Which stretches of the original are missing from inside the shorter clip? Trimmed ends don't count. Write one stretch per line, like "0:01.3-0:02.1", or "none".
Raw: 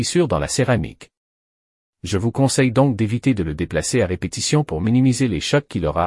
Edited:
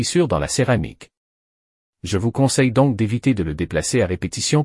none